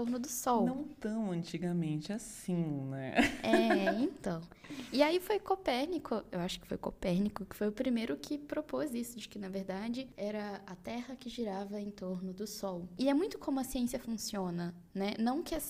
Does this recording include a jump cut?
no; 0 cuts

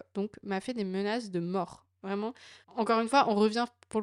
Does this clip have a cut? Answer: yes; 1 cut; at 2.6 s

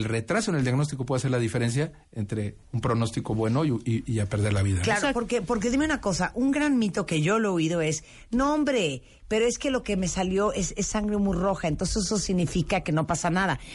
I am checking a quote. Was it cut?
no; 0 cuts

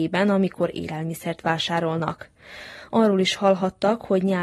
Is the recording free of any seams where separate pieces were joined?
yes; 0 cuts

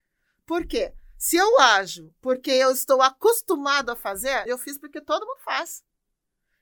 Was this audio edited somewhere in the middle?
yes; 1 cut; at 4.5 s

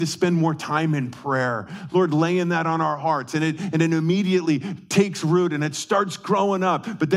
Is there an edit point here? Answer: no; 0 cuts

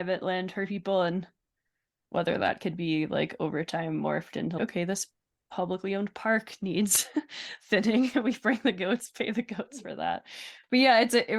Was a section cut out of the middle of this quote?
no; 0 cuts

